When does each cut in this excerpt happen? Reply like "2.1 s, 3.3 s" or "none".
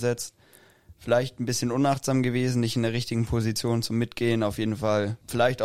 none